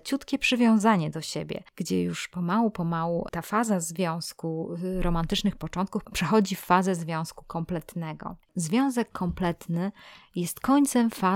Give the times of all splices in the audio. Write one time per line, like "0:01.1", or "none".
none